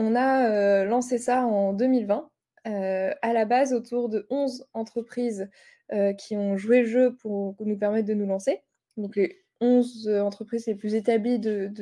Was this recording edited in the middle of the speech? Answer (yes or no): no